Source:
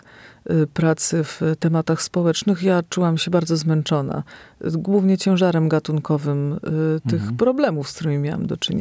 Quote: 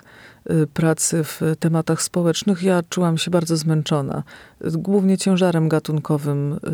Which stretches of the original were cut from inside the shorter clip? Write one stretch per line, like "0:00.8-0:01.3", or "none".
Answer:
none